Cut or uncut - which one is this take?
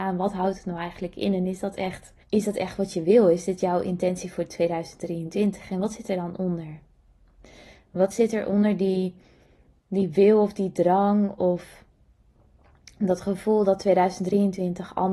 cut